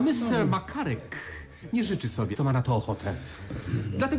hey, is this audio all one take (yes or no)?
no